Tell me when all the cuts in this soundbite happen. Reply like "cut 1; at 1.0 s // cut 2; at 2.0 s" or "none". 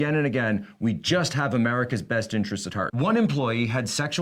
cut 1; at 2.9 s